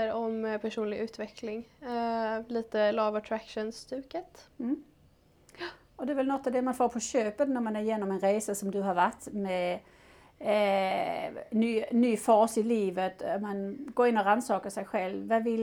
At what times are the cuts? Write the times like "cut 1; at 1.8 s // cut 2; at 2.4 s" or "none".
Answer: none